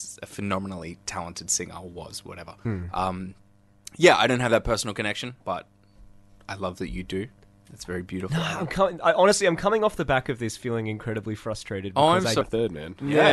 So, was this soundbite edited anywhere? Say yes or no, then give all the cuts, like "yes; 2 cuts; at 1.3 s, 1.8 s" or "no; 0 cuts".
yes; 2 cuts; at 5.4 s, 12.4 s